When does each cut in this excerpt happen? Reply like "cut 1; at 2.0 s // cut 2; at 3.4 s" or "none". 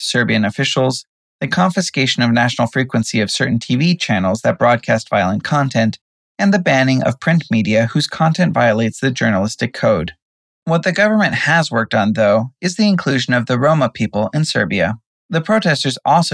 cut 1; at 10.5 s // cut 2; at 15.1 s